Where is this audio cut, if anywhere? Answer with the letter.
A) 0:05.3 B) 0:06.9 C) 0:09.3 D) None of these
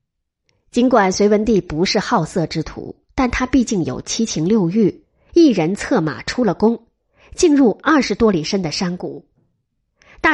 A